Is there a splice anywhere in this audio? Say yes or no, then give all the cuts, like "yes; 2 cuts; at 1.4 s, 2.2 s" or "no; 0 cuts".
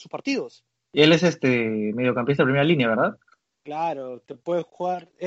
no; 0 cuts